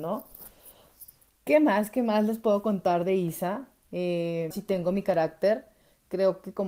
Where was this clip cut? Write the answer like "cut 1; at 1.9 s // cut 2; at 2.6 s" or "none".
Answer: cut 1; at 1.3 s // cut 2; at 4.5 s